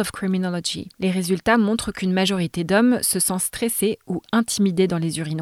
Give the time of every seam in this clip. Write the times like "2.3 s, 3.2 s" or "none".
none